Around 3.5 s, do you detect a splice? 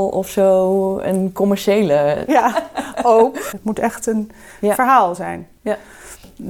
yes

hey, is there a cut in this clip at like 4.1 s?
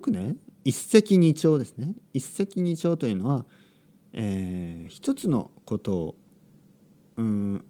no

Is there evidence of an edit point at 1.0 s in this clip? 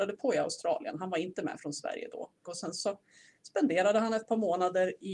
no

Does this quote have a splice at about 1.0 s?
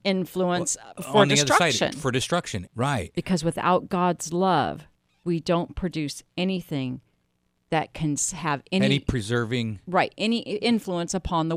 yes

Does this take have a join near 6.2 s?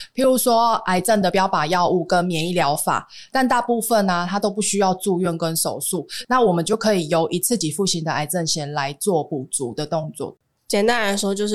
yes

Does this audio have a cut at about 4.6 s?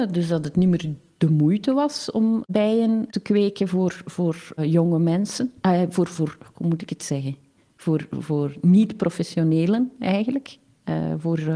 yes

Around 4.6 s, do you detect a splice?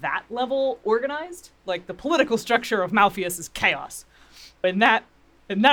yes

